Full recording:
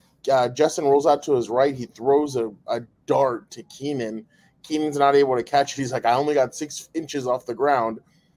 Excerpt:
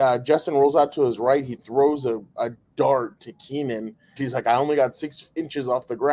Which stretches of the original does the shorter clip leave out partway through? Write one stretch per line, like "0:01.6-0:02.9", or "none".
0:04.5-0:05.7